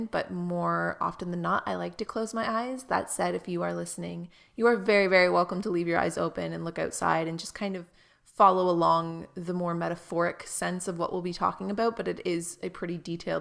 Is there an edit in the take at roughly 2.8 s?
no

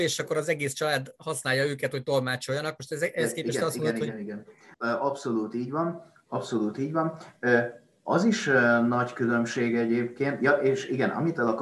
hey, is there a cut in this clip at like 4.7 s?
yes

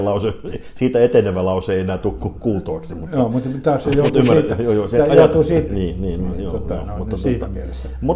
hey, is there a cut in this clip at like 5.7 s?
yes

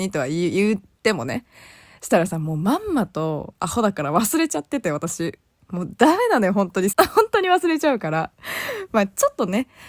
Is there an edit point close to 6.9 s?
yes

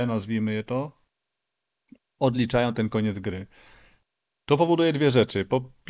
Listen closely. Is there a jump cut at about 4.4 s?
no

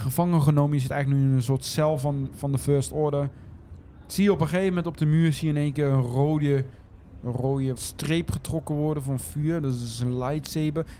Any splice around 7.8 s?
yes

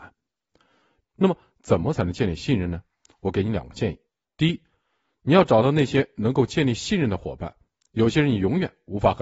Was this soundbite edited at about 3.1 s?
no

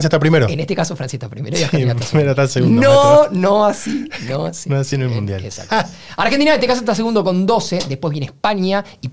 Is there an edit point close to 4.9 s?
no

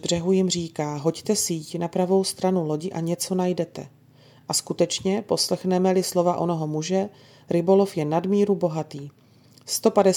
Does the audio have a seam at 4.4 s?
no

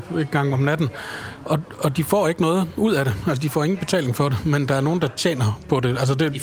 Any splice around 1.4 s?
no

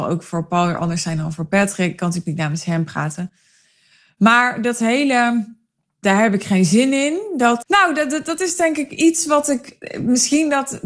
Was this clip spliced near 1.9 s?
no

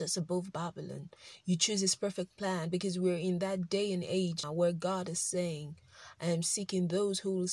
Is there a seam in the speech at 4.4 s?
yes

